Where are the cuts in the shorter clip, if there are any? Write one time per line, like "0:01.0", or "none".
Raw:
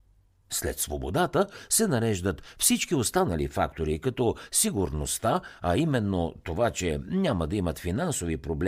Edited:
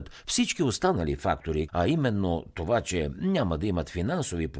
0:01.7